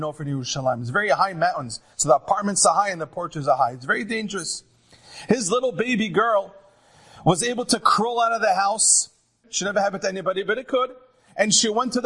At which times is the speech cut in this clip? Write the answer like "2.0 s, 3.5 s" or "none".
9.4 s